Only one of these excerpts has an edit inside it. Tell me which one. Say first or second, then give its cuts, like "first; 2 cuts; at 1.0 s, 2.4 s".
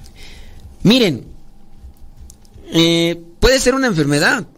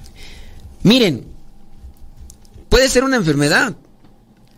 second; 1 cut; at 2.6 s